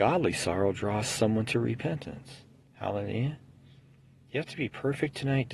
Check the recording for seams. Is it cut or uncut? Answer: cut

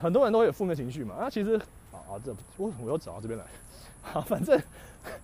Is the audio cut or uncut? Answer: cut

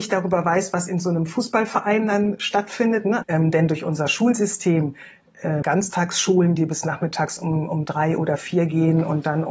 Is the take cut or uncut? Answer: cut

